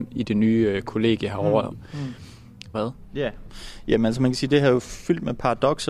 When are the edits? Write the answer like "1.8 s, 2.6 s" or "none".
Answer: 1.7 s, 2.7 s

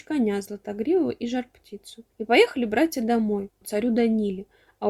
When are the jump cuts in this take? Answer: 2.1 s, 3.6 s

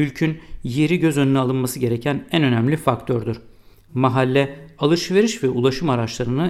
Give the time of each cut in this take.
none

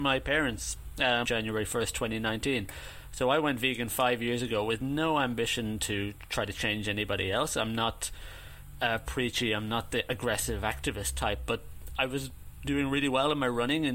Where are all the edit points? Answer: 1.2 s

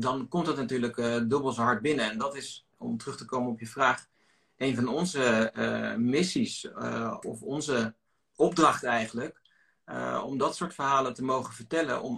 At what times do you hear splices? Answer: 7.2 s

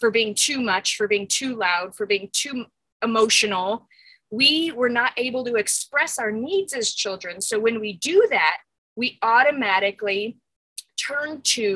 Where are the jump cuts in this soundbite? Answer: none

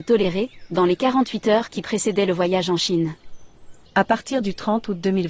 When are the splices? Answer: 3.8 s

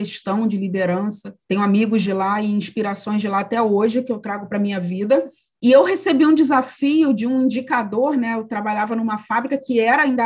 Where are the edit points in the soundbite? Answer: 1.4 s

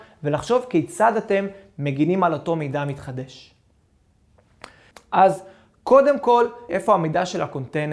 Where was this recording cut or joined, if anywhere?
4.9 s, 6.7 s

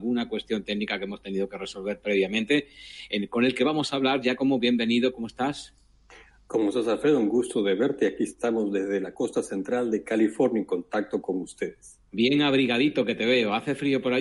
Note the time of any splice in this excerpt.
12.1 s

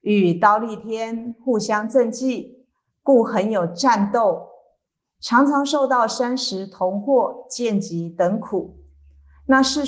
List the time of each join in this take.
none

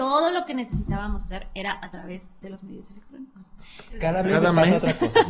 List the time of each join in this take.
3.9 s

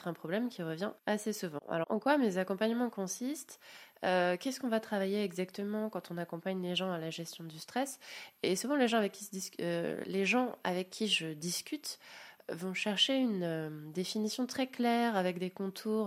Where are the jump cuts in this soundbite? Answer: 1.0 s

